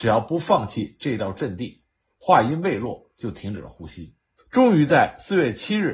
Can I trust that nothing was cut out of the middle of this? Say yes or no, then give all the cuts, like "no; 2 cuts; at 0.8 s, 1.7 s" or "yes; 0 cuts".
no; 1 cut; at 4.4 s